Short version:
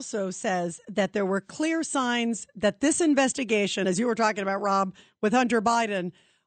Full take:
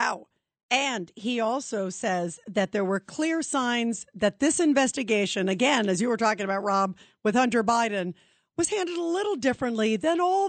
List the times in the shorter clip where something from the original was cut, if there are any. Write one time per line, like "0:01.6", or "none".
0:03.8